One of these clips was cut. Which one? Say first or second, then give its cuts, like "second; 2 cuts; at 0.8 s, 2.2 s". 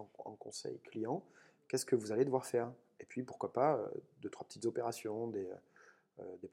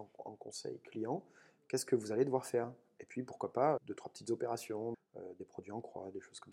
second; 2 cuts; at 3.8 s, 4.9 s